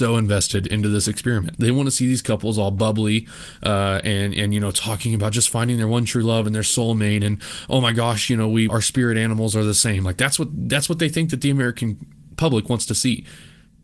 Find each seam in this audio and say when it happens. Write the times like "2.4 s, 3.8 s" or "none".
1.5 s, 8.7 s